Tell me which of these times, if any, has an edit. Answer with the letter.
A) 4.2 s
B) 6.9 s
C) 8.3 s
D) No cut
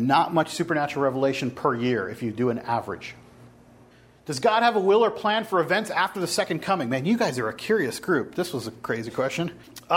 D